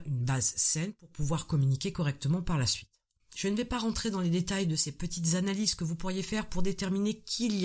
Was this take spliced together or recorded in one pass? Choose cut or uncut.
cut